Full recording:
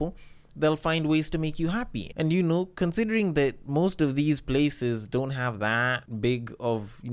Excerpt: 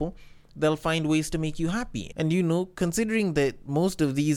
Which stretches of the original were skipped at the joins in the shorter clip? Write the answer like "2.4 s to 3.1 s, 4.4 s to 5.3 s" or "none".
none